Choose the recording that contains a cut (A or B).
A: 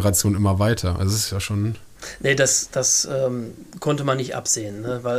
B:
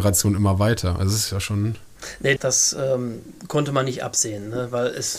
B